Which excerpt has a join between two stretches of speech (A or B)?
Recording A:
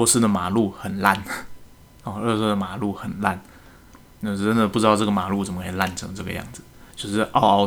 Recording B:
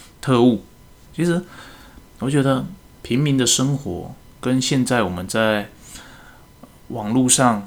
B